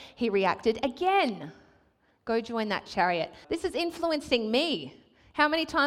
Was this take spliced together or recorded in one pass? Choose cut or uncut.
cut